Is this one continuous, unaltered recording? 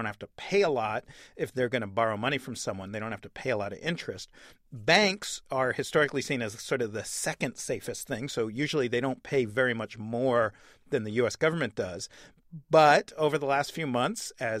yes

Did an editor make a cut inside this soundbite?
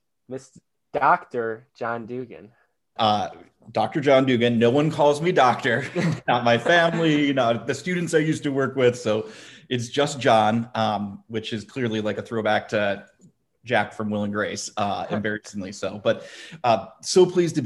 yes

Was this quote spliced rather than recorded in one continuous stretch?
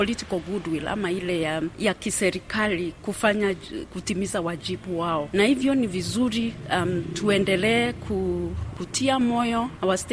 no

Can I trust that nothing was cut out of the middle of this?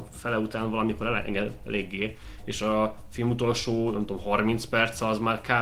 yes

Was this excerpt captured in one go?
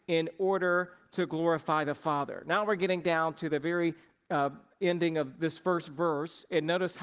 yes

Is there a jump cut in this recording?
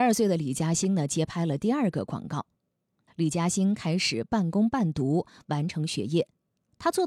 yes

